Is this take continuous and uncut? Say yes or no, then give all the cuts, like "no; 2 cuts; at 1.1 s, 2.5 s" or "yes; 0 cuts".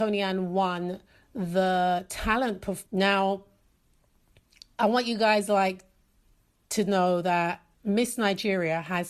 no; 2 cuts; at 2.9 s, 7.7 s